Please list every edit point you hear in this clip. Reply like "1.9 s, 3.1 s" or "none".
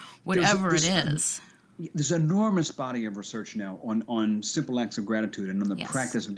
none